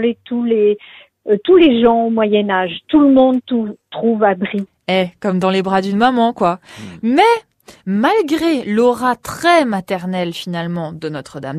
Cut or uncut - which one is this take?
uncut